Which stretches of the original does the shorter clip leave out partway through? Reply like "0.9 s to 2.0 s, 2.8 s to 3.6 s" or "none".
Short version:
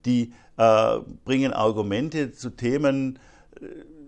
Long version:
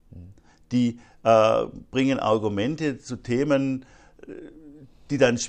none